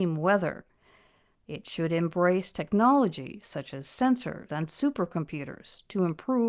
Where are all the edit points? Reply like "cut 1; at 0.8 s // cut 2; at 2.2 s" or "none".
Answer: cut 1; at 1.3 s // cut 2; at 4.5 s